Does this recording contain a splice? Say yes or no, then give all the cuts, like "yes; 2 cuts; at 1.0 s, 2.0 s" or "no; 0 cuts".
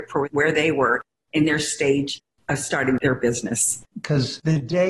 yes; 1 cut; at 3.9 s